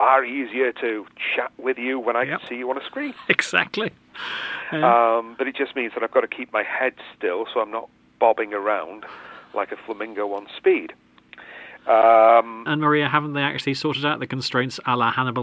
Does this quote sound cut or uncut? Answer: cut